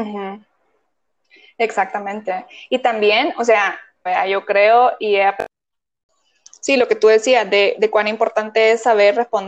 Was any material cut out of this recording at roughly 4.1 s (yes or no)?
yes